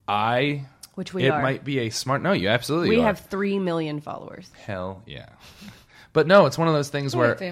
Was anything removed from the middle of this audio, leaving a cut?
no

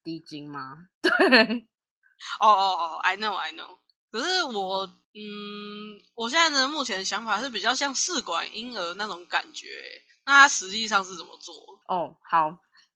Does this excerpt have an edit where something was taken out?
yes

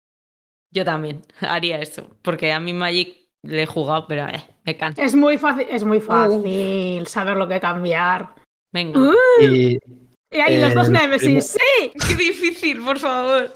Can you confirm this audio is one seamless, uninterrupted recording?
no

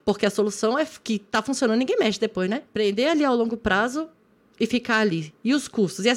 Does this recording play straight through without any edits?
yes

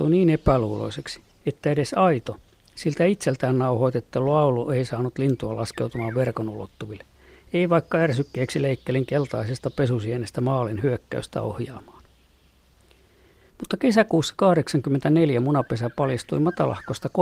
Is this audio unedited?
yes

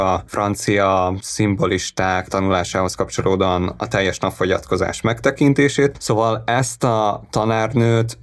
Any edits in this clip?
no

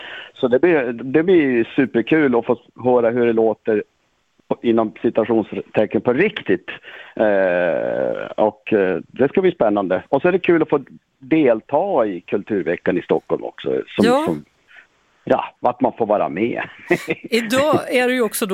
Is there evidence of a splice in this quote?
no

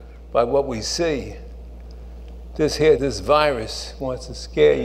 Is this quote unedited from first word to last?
no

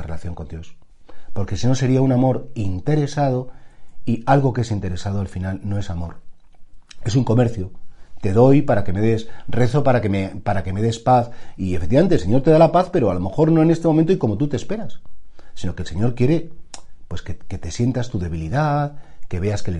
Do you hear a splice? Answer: no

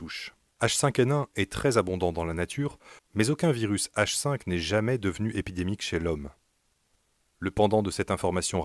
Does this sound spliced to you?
yes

